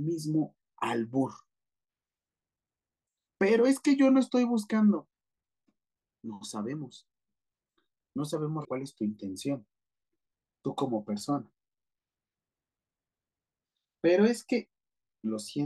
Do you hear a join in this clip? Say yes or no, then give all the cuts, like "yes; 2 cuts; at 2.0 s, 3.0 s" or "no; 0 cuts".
yes; 1 cut; at 8.6 s